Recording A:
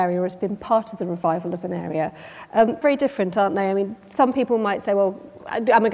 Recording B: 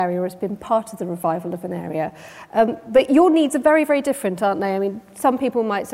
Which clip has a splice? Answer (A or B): A